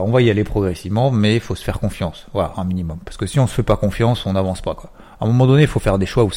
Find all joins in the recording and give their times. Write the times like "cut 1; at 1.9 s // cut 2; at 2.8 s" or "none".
none